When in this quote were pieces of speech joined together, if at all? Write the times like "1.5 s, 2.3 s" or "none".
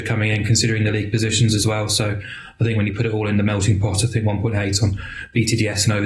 none